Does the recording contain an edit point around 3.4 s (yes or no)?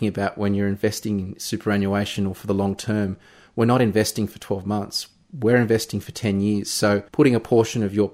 no